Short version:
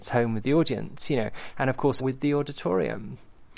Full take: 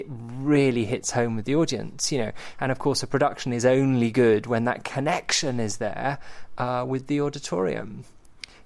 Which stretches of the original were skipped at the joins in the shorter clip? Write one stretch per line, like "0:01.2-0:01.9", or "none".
0:03.0-0:06.9